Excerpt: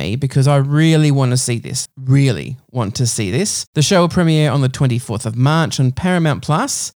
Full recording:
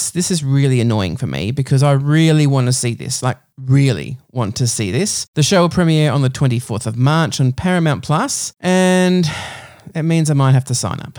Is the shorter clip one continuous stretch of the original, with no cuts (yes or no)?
no